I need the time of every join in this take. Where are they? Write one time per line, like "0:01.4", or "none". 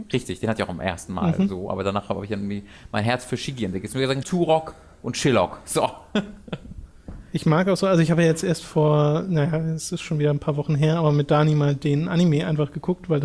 0:04.2

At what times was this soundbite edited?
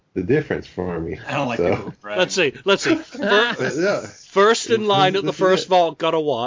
none

